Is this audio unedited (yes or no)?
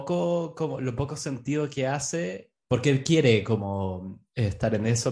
no